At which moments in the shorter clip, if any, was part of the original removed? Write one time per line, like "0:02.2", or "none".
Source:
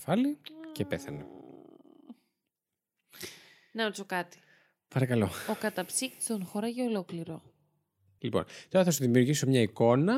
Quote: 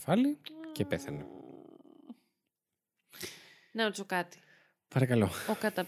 none